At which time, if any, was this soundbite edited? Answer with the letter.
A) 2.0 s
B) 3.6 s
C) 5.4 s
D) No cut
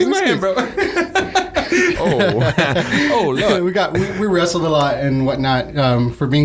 A